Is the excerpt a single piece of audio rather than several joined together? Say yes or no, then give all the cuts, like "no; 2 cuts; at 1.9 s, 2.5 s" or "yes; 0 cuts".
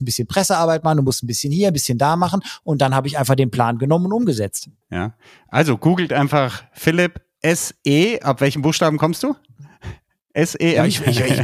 no; 1 cut; at 4.8 s